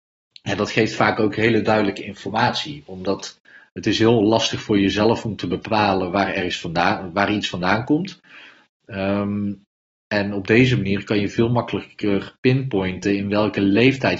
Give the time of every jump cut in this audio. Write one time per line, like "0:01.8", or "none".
none